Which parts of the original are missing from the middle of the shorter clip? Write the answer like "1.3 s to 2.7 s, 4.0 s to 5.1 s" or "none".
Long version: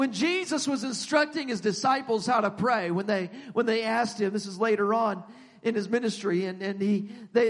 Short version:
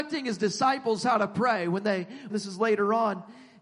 3.5 s to 4.3 s